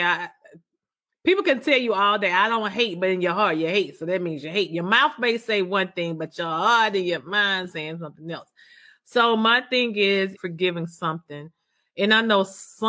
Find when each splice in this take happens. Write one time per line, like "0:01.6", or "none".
0:10.3

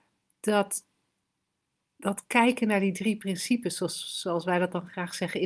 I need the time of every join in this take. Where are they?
none

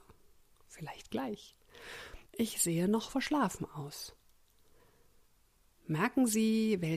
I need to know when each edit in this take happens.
0:02.3

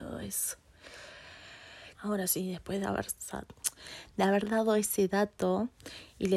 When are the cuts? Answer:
0:01.9

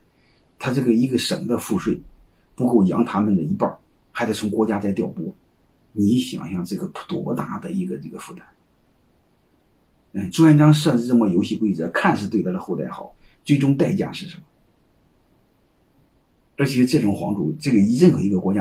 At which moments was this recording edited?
0:16.4

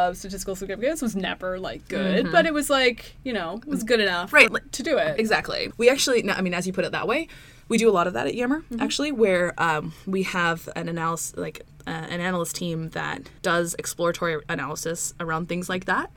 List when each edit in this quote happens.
0:04.5
0:13.4

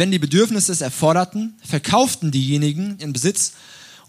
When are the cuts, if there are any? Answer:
0:03.0

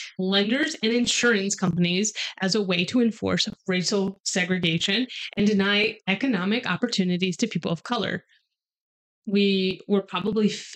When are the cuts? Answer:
0:09.2

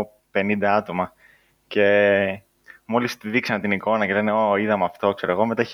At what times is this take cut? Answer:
none

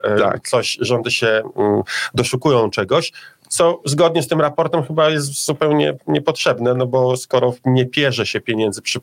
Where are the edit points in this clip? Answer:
none

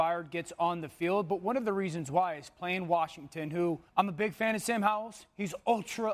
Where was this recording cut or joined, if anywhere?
0:03.9

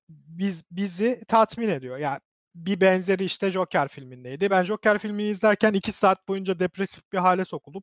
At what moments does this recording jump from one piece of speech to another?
none

